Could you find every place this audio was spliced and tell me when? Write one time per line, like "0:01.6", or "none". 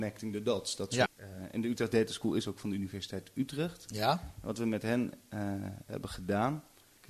0:01.1